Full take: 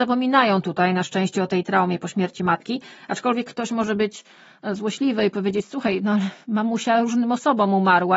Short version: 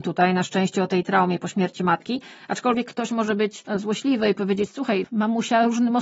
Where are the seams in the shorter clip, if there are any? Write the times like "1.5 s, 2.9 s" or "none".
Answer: 3.7 s, 5.0 s